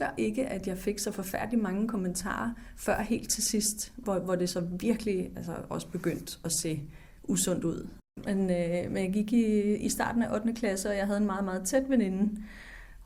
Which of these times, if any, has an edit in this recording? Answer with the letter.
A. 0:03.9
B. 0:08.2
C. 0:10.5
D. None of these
D